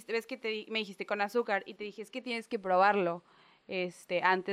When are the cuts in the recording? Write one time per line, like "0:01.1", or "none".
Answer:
none